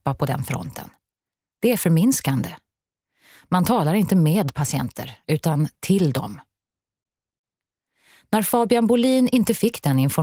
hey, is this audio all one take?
yes; 0 cuts

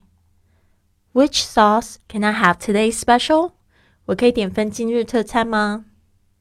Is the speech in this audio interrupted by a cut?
yes; 1 cut; at 2.0 s

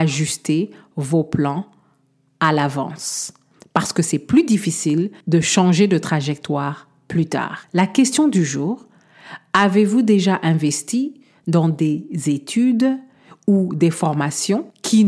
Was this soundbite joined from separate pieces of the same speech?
no; 0 cuts

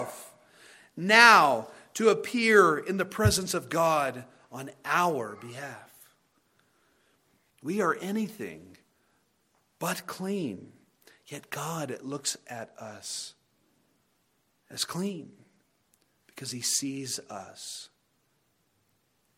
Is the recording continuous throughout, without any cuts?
no; 1 cut; at 7.5 s

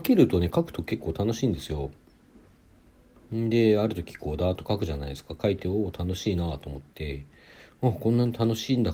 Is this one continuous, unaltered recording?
yes; 0 cuts

